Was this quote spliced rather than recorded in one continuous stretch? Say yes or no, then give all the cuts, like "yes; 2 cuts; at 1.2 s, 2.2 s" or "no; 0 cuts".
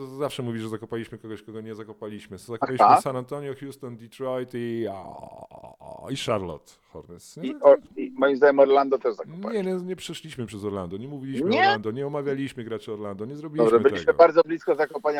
no; 0 cuts